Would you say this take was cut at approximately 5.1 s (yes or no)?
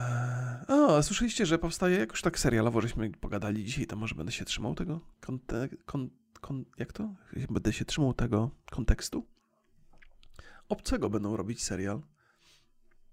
yes